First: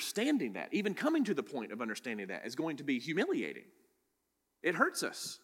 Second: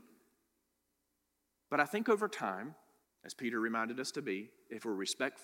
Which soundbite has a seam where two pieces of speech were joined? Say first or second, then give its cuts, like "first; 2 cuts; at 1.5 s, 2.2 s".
second; 1 cut; at 3.0 s